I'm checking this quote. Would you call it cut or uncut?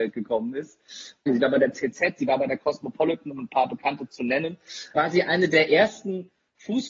cut